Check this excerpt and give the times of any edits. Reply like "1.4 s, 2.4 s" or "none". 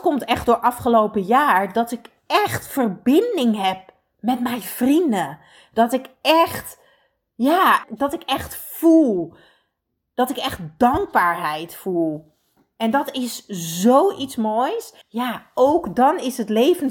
7.8 s, 15.0 s